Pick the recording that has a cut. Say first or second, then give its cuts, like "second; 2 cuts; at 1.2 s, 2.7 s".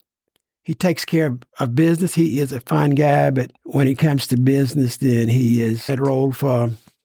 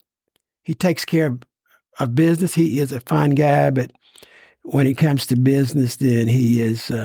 first; 3 cuts; at 1.5 s, 3.6 s, 5.9 s